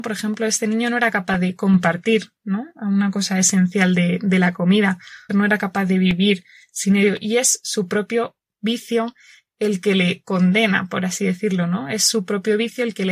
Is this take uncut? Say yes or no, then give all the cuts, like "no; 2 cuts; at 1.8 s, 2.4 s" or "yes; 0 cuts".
no; 1 cut; at 5.3 s